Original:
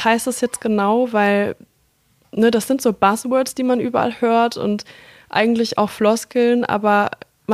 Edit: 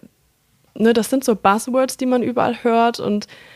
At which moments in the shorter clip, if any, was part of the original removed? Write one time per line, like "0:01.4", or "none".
none